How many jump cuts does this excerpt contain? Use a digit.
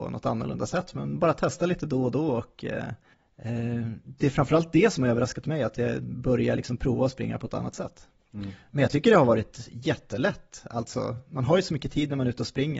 2